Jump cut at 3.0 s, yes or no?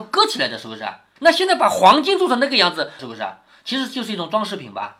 yes